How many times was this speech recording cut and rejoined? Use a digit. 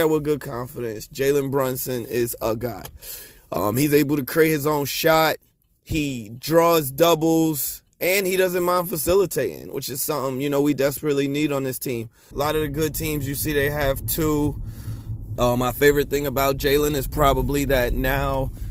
2